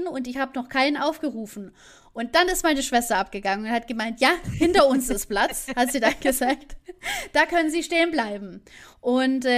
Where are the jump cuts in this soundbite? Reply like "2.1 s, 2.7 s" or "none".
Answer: none